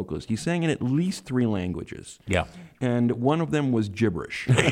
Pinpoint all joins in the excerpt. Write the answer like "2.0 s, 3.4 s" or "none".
none